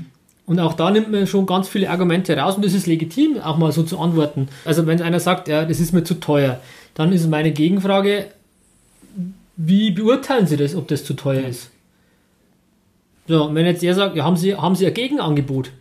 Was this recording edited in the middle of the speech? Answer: yes; 1 cut; at 4.7 s

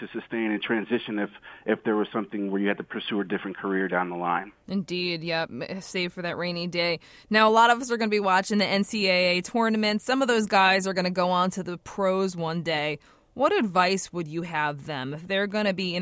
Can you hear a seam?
no; 0 cuts

